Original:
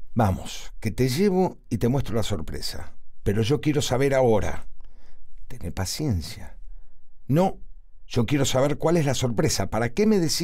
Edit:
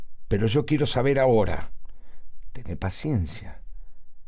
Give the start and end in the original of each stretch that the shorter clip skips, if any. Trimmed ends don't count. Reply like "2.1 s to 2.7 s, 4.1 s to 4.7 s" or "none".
none